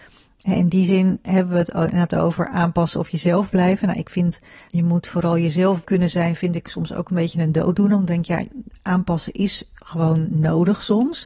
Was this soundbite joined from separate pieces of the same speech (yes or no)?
no